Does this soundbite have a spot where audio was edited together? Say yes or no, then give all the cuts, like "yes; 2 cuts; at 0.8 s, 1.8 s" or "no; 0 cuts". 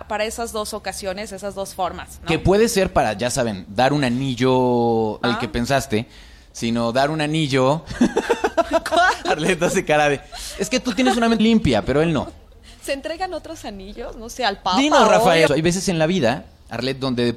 yes; 3 cuts; at 5.2 s, 11.4 s, 15.5 s